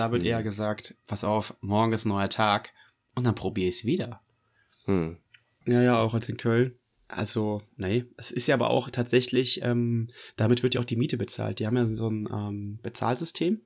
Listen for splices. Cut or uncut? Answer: cut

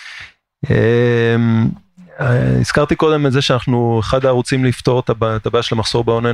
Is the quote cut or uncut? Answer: uncut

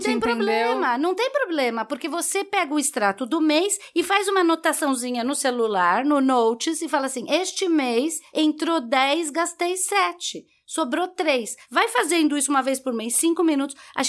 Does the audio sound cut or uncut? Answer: uncut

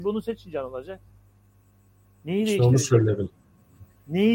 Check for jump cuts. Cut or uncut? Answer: uncut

